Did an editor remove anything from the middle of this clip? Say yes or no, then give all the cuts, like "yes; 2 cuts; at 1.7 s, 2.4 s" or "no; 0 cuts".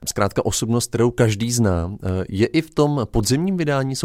no; 0 cuts